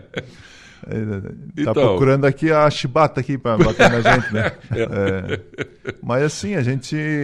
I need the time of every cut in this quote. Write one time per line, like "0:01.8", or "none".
0:04.8